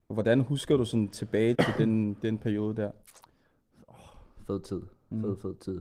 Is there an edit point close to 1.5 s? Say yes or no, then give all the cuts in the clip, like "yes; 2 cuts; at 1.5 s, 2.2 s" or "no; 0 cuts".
yes; 1 cut; at 1.5 s